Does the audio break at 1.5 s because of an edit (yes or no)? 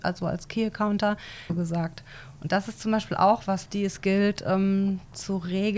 yes